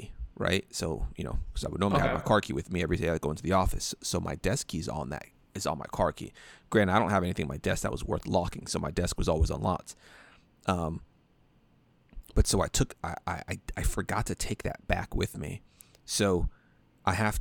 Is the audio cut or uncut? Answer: uncut